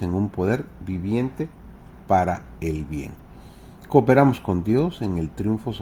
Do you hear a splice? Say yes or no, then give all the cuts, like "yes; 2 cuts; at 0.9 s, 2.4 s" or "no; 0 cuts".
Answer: no; 0 cuts